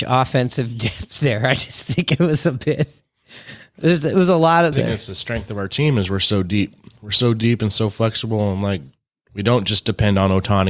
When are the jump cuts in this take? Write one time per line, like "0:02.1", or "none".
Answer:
0:04.7